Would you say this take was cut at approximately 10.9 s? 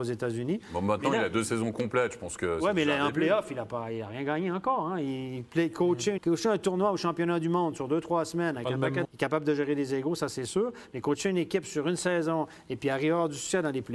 no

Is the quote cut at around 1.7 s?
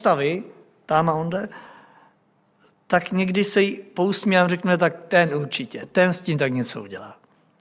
no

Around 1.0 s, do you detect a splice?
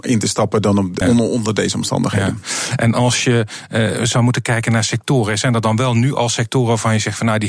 yes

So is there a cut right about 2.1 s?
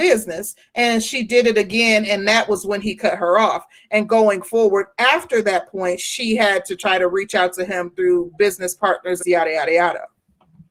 no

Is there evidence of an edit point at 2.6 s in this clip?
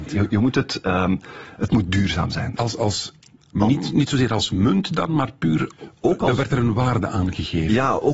yes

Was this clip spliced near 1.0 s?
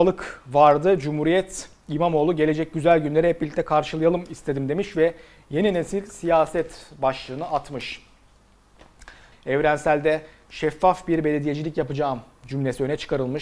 no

